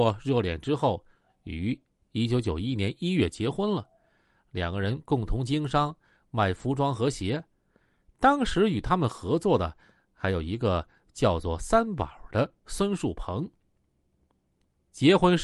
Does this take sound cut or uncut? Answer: uncut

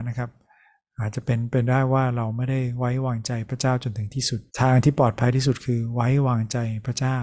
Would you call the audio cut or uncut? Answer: cut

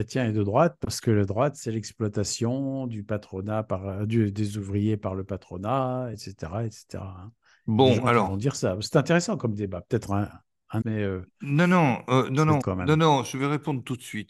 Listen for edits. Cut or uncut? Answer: cut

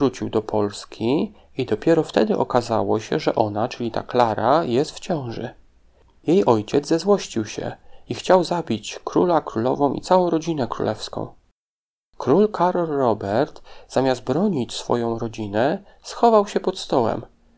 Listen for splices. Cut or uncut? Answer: uncut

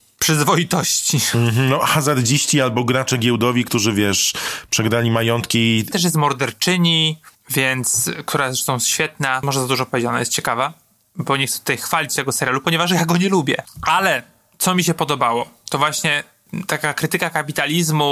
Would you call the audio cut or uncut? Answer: uncut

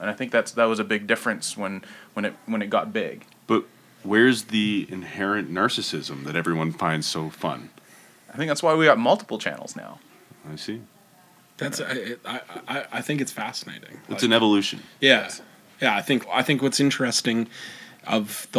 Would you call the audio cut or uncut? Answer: cut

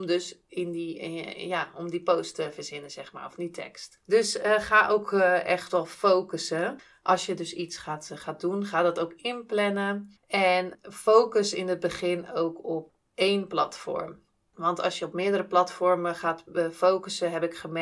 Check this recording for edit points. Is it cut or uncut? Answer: cut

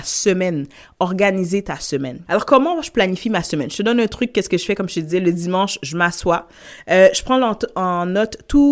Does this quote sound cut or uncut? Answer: cut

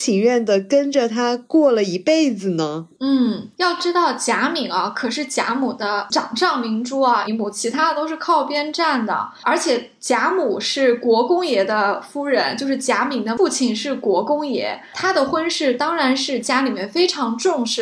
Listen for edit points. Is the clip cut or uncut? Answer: cut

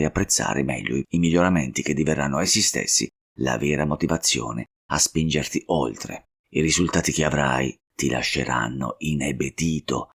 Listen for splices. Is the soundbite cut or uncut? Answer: cut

